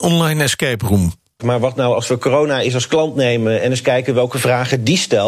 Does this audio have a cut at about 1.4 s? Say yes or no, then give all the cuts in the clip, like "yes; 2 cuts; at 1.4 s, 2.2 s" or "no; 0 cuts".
yes; 1 cut; at 1.4 s